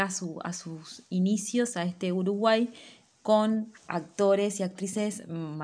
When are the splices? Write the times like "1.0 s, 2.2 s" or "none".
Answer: 3.8 s